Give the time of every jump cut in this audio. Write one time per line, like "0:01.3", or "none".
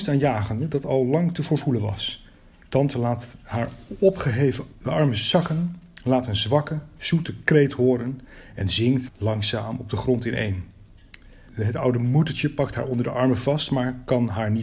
0:09.1